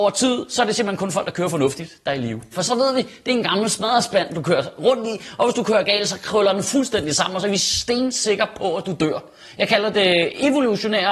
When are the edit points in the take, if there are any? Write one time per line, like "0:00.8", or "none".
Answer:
0:02.5